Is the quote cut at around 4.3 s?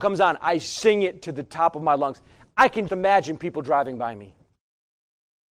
no; 1 cut; at 2.9 s

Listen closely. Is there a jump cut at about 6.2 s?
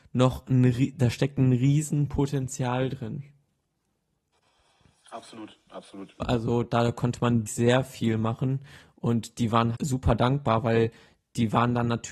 yes; 3 cuts; at 6.2 s, 7.5 s, 9.7 s

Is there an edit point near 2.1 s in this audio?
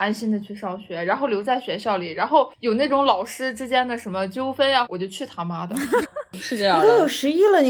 no; 2 cuts; at 4.9 s, 6.0 s

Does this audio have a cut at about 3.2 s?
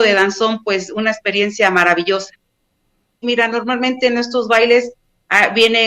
yes; 1 cut; at 3.2 s

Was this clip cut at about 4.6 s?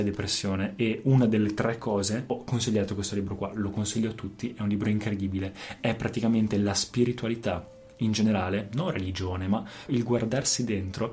no; 1 cut; at 9.9 s

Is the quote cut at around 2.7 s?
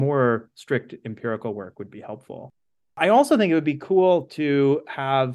no; 0 cuts

